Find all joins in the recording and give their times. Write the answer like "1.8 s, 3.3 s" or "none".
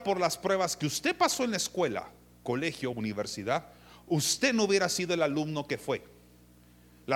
none